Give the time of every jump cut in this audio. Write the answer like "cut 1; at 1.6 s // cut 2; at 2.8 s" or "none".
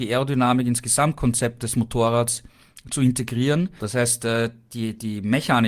cut 1; at 3.8 s

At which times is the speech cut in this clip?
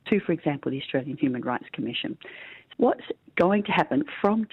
cut 1; at 2.7 s

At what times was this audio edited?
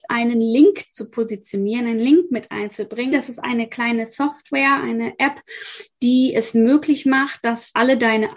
cut 1; at 3.1 s

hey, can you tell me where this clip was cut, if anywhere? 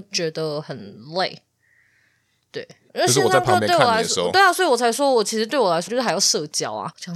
cut 1; at 2.9 s // cut 2; at 5.9 s

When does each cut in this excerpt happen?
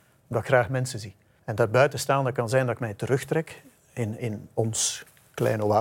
cut 1; at 1.4 s

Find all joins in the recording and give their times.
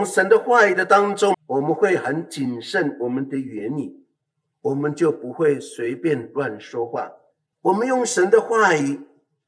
cut 1; at 1.3 s // cut 2; at 7.5 s

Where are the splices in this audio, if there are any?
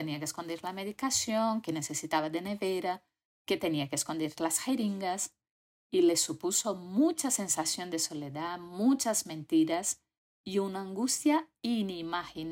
none

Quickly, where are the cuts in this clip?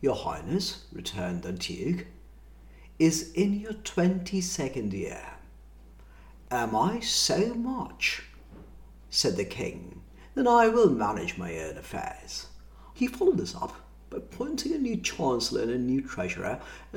cut 1; at 12.9 s

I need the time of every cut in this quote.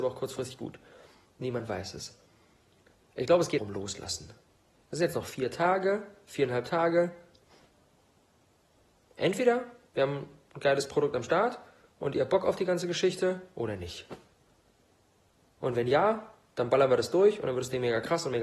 cut 1; at 3.6 s

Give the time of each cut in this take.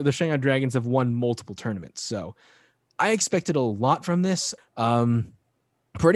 cut 1; at 4.6 s

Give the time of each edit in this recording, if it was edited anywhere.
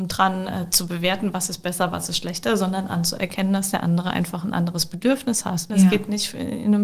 cut 1; at 5.7 s

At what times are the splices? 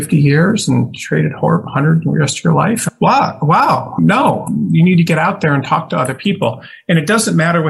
none

